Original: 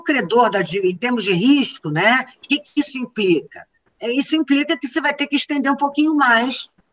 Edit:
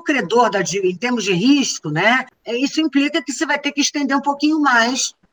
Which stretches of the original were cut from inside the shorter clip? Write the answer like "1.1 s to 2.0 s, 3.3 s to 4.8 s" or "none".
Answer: 2.3 s to 3.8 s